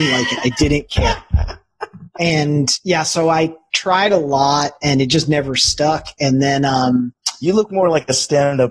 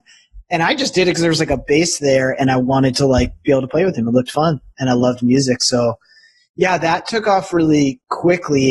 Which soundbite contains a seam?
second; 1 cut; at 4.7 s

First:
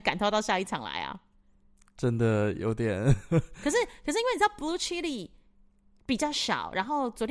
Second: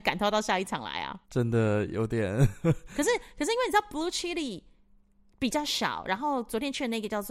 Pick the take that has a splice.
second; 1 cut; at 1.2 s

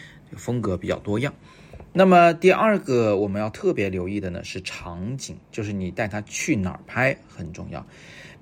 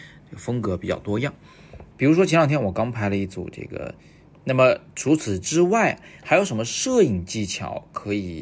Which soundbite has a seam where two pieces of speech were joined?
second; 2 cuts; at 1.9 s, 4.3 s

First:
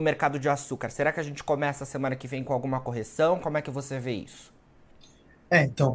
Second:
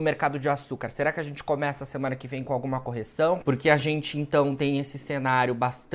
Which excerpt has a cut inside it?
second; 1 cut; at 3.4 s

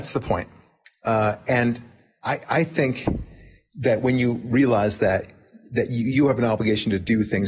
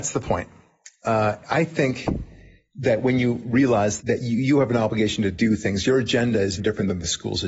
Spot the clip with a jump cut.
second; 3 cuts; at 1.4 s, 4.0 s, 6.6 s

